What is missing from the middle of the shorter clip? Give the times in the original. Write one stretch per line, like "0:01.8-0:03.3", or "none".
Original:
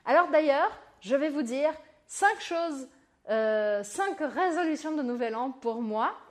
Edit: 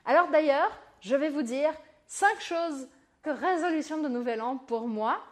0:03.2-0:04.2